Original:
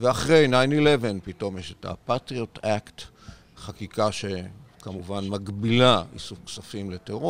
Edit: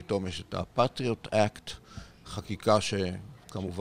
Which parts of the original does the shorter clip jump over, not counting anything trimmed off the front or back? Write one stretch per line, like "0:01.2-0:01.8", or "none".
none